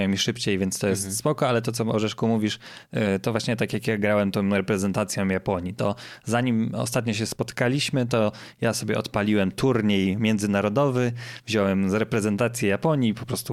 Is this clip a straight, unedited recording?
yes; 0 cuts

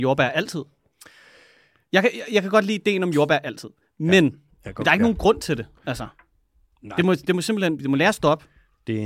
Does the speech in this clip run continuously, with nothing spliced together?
no; 1 cut; at 7.8 s

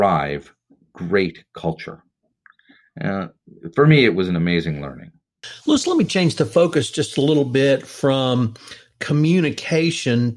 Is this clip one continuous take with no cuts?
yes; 0 cuts

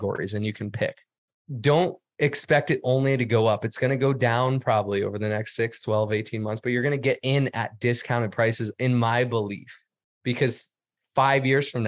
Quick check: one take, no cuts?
yes; 0 cuts

